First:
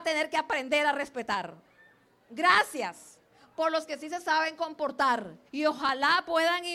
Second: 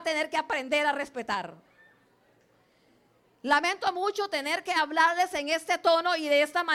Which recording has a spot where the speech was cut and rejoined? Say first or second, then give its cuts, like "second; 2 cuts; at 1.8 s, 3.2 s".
first; 2 cuts; at 2.3 s, 5.5 s